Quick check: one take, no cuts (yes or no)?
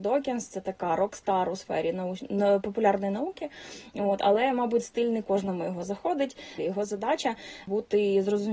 no